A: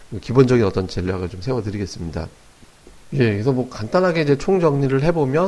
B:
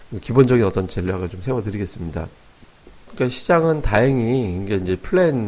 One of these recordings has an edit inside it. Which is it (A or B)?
B